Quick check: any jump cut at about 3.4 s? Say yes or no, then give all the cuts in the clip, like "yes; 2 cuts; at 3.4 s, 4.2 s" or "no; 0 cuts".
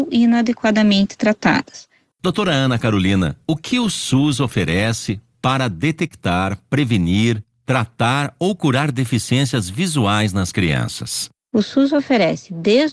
no; 1 cut; at 2.1 s